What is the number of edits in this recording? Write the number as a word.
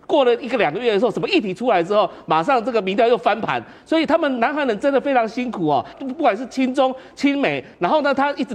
zero